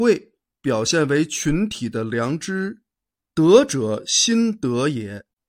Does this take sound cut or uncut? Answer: uncut